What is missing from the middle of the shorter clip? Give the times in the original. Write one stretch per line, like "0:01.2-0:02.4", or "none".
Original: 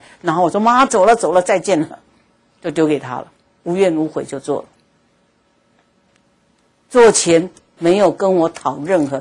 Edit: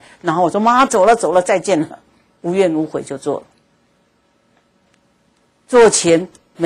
0:02.4-0:03.6